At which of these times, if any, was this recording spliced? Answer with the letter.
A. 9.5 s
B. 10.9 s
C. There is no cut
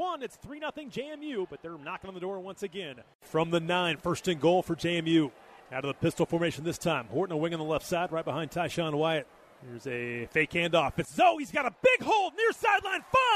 C